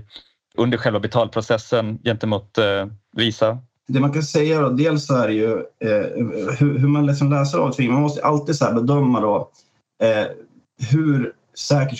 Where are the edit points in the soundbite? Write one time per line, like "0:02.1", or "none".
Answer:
none